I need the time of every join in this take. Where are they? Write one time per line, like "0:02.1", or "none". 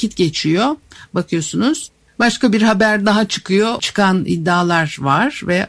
0:03.8